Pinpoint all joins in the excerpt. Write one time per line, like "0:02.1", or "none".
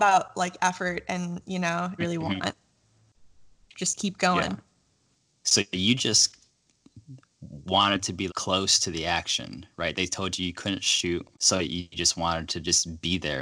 0:02.0
0:08.3
0:11.3